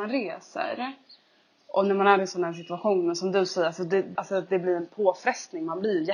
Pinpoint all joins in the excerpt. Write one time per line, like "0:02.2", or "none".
0:04.1